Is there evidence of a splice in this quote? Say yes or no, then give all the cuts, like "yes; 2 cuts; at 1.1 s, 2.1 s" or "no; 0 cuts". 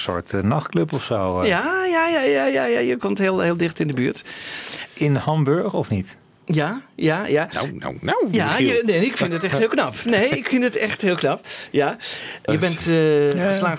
yes; 1 cut; at 12.5 s